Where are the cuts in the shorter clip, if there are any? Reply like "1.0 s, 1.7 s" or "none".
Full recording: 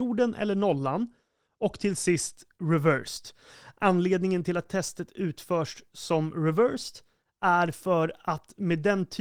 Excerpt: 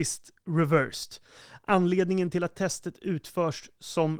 none

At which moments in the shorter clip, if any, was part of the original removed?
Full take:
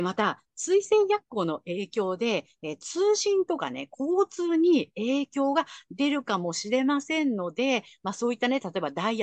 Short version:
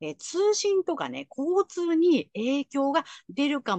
none

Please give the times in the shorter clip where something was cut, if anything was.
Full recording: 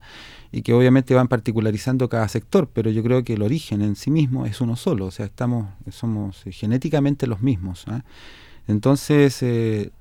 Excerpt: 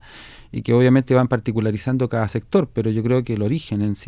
none

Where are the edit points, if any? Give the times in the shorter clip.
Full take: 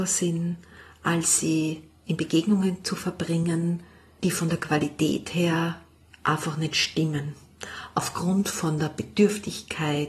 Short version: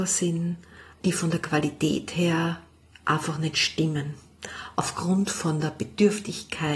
0.9 s

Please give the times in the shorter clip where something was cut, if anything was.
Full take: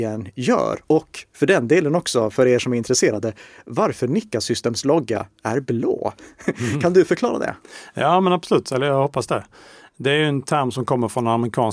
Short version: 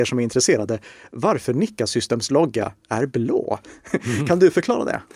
none

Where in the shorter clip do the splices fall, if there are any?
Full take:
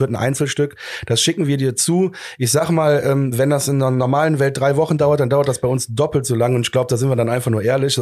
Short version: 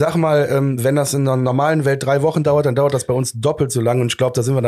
none

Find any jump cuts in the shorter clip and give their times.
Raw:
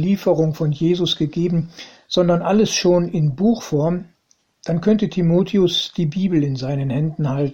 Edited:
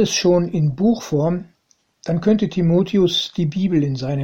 none

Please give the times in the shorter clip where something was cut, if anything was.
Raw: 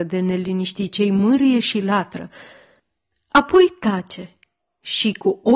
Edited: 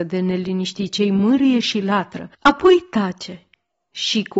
2.3 s

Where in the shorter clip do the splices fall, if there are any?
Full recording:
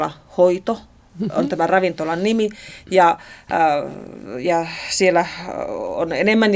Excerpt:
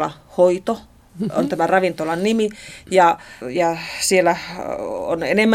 3.4 s

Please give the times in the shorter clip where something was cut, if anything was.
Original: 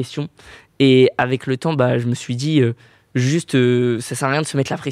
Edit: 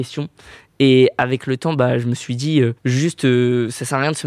2.8 s

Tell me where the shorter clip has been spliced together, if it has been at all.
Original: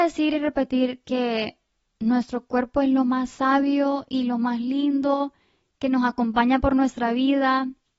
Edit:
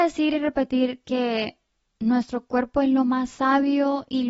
none

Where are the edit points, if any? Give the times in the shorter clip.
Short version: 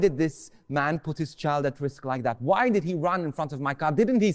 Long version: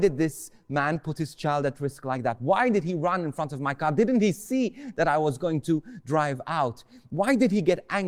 none

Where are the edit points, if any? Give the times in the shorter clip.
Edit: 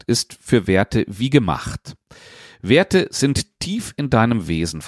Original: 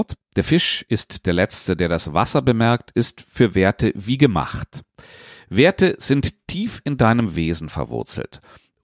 none

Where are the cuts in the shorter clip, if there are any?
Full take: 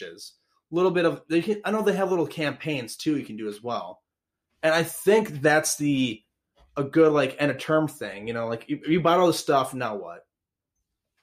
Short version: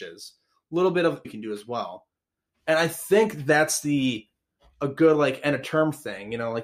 1.2 s

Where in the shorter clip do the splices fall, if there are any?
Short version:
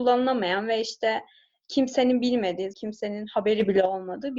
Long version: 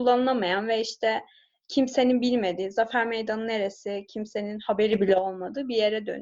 2.7 s

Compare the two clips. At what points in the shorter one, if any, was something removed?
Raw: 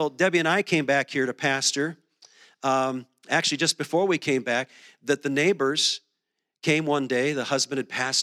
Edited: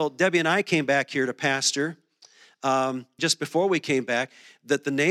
3.2 s

